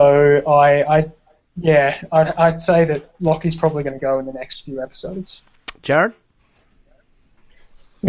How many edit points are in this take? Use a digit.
0